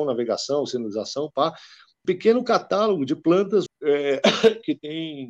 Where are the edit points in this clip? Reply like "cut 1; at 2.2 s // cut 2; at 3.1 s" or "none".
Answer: cut 1; at 2.0 s // cut 2; at 3.7 s

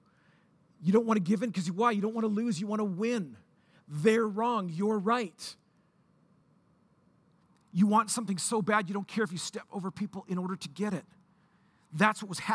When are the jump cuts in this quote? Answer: none

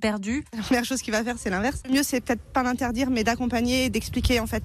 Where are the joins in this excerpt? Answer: cut 1; at 1.8 s

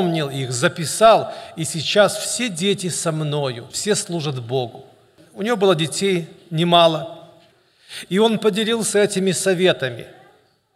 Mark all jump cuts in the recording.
cut 1; at 3.7 s

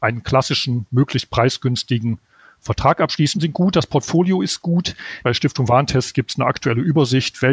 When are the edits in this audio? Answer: cut 1; at 3.3 s // cut 2; at 5.2 s

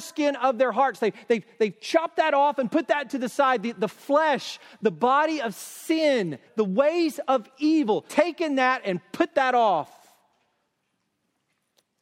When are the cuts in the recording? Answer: cut 1; at 6.5 s // cut 2; at 8.1 s

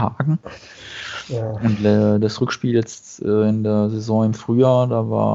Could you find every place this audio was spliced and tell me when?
none

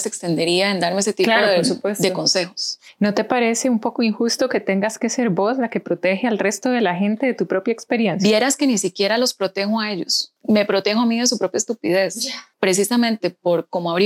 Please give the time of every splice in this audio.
none

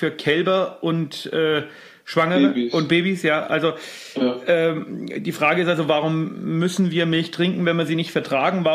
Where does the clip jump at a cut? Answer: none

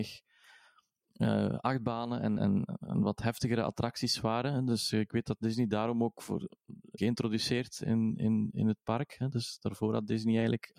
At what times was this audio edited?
cut 1; at 2.4 s // cut 2; at 7.0 s

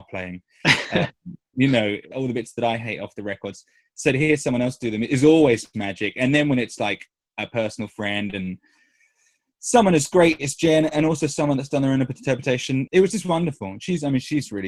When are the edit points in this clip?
cut 1; at 2.1 s // cut 2; at 12.9 s

